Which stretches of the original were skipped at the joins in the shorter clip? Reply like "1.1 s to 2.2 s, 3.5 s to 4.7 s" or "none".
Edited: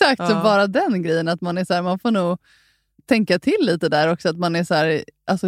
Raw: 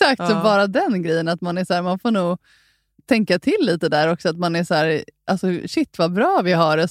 none

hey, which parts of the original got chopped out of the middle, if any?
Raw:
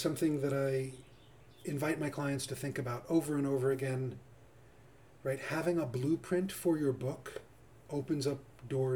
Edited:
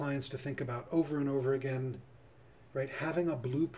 4.8 s to 5.2 s

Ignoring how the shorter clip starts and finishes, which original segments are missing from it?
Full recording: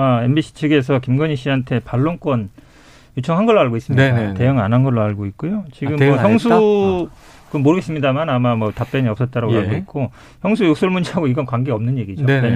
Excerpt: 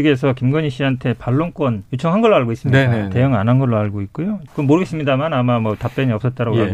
2.5 s to 3.1 s, 5.7 s to 7.4 s

